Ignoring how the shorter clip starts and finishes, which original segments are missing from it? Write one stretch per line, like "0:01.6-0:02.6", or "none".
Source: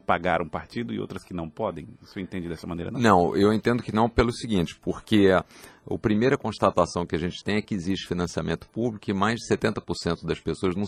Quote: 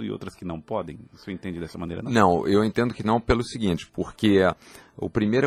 none